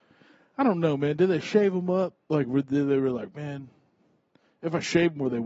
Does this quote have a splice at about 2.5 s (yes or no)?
no